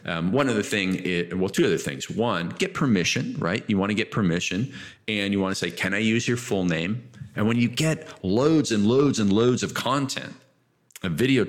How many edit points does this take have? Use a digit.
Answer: 1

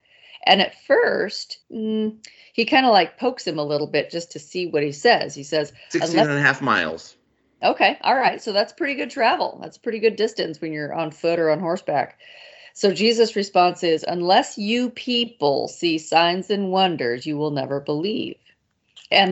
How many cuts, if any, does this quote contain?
1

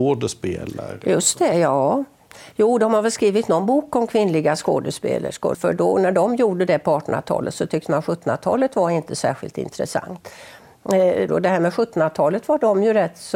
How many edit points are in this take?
2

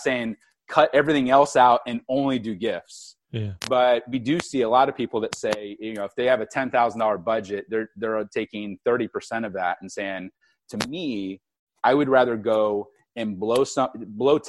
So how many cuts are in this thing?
0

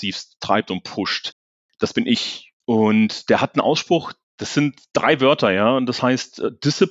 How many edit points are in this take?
1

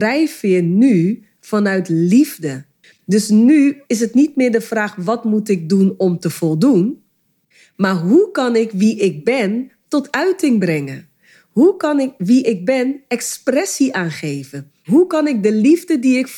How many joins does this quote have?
1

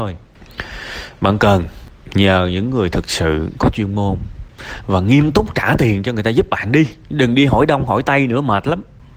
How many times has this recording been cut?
1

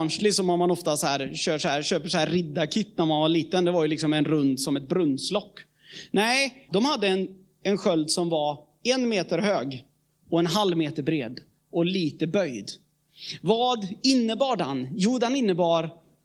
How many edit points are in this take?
1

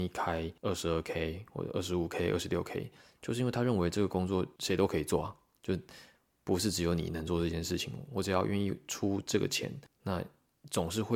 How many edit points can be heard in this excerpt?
0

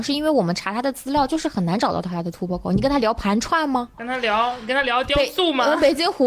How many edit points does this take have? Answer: 1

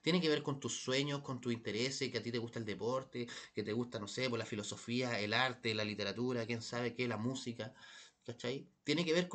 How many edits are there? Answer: 0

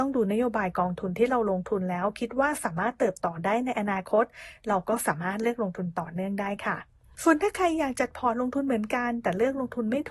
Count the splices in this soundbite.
1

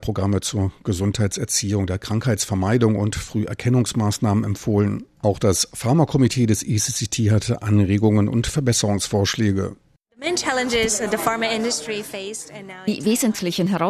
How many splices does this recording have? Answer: 0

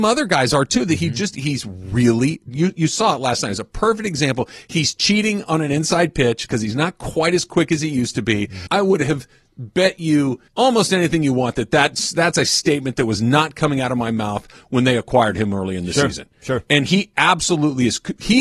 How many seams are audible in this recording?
2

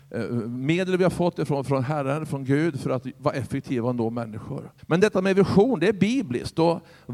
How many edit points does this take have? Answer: 1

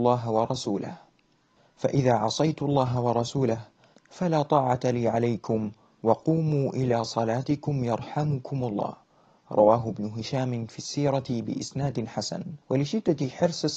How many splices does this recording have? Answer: 1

